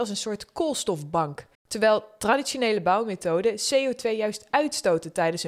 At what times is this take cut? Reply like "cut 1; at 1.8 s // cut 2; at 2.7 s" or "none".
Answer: cut 1; at 1.6 s